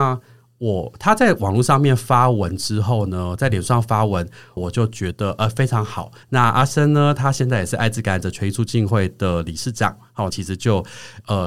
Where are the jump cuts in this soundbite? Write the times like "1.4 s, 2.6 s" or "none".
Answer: 4.6 s, 6.2 s, 10.3 s